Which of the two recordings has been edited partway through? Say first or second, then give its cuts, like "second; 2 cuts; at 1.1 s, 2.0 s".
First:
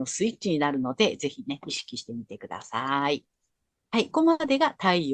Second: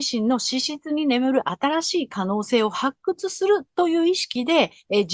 first; 1 cut; at 4.1 s